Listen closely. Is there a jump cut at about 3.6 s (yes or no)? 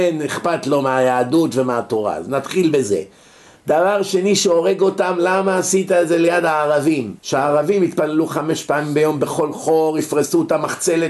no